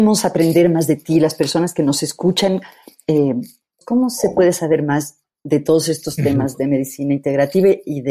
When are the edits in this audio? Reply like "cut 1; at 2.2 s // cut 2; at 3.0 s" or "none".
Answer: cut 1; at 3.8 s